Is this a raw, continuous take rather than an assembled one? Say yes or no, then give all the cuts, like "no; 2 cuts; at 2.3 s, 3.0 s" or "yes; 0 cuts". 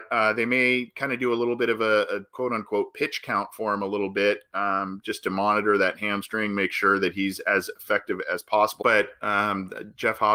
no; 1 cut; at 8.8 s